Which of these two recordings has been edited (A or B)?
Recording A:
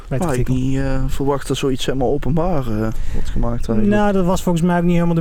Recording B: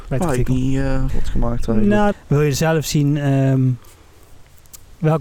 B